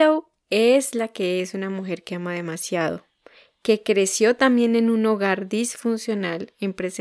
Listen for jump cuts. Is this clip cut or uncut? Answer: uncut